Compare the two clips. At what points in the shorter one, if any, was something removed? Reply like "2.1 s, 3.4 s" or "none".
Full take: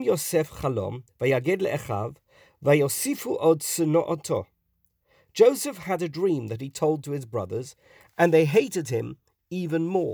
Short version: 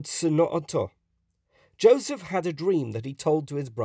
none